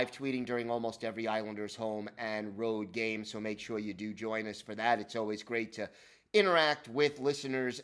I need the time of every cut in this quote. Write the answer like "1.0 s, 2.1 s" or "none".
none